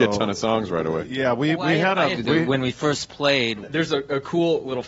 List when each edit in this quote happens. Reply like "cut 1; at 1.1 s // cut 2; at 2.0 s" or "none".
cut 1; at 2.2 s // cut 2; at 3.6 s